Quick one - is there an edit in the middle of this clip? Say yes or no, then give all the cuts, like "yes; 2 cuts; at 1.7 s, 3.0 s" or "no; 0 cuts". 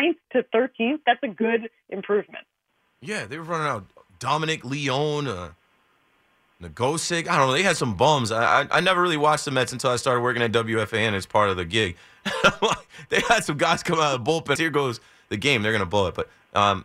yes; 1 cut; at 14.6 s